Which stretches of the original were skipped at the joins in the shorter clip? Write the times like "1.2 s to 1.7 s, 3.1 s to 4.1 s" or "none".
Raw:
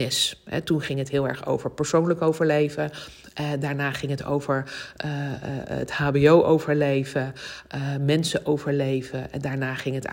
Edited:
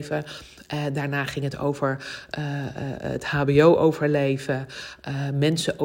none